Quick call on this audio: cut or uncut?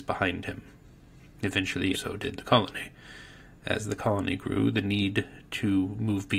cut